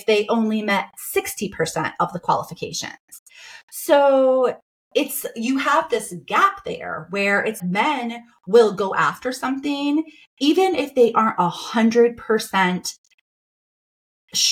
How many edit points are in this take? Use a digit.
1